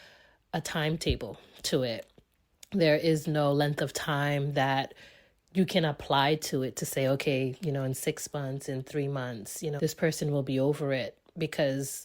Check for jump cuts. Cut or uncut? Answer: cut